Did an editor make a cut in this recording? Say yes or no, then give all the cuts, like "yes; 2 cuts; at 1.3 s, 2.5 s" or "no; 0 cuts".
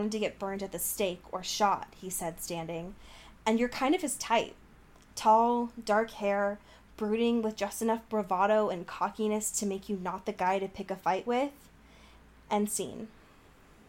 no; 0 cuts